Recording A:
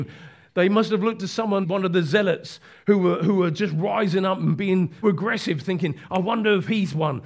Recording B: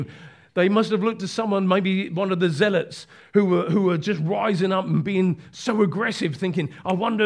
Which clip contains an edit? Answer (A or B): A